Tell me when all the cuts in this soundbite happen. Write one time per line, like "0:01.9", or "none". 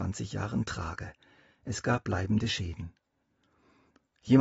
none